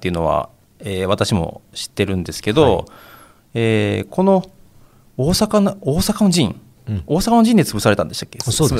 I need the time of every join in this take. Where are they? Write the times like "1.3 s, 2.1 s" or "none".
none